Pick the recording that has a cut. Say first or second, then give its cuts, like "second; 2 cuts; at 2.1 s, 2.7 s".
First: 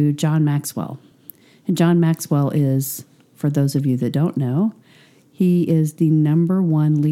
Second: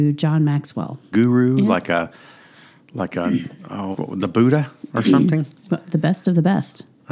second; 2 cuts; at 1.1 s, 3.9 s